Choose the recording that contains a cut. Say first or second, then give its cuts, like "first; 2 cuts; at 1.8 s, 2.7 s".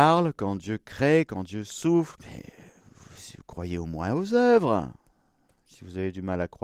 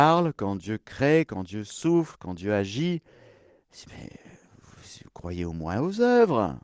first; 1 cut; at 2.2 s